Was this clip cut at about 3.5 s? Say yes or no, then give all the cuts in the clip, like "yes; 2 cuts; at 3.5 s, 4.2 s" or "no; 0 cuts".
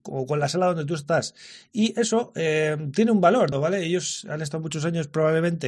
yes; 1 cut; at 3.5 s